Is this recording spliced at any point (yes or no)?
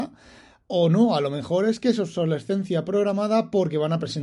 no